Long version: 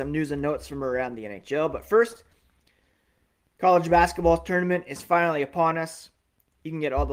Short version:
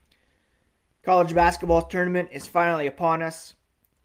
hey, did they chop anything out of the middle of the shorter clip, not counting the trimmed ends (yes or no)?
no